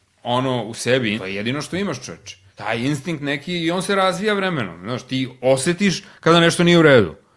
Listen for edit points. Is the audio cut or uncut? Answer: cut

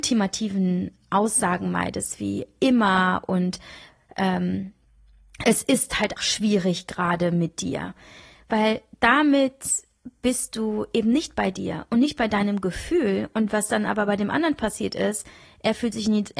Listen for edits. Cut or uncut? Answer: cut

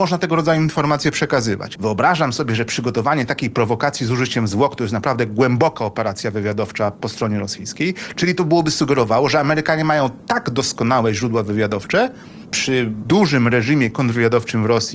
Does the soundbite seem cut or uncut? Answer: cut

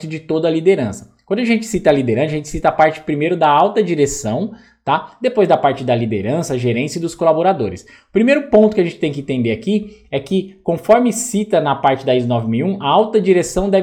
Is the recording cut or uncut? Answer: uncut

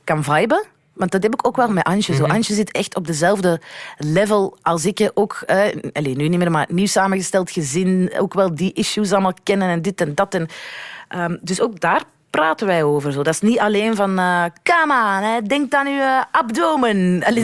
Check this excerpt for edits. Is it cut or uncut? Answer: uncut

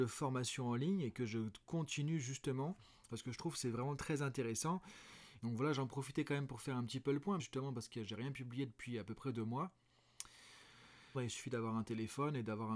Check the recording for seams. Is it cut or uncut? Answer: cut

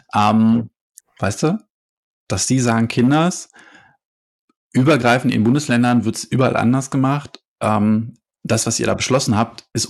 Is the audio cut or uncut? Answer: cut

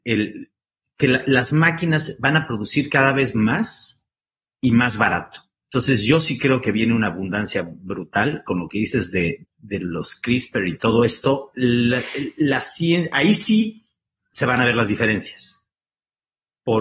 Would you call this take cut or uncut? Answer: cut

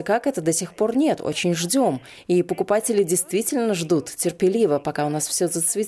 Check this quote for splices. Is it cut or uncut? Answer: uncut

